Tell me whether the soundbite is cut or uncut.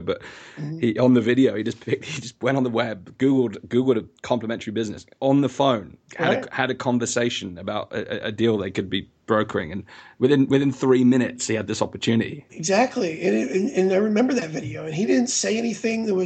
cut